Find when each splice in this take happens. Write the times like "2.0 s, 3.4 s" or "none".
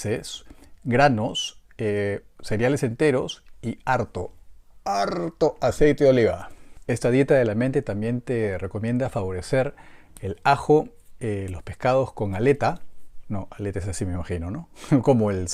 none